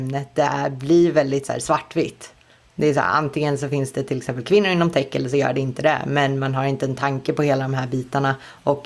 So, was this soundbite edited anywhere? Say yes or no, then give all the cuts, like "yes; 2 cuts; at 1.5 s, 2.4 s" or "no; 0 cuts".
no; 0 cuts